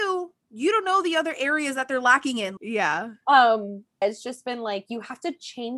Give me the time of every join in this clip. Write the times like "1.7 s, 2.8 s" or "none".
2.6 s, 4.0 s